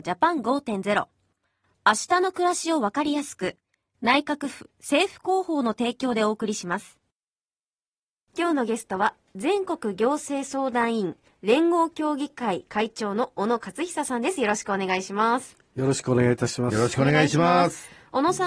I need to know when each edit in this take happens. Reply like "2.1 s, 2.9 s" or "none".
none